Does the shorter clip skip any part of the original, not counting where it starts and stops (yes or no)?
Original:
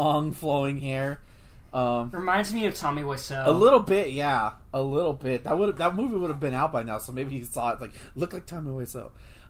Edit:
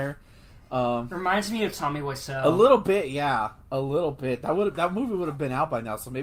no